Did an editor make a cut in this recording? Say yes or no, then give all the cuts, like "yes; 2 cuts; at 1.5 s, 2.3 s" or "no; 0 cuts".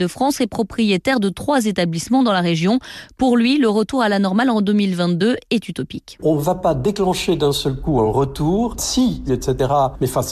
yes; 1 cut; at 9.3 s